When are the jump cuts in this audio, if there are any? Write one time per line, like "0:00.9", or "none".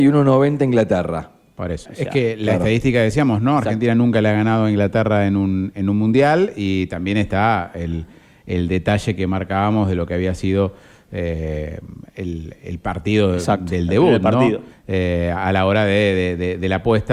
0:01.8
0:14.7